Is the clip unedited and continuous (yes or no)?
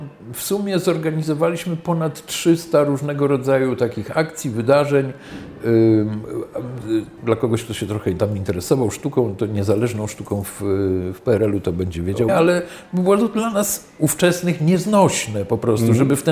no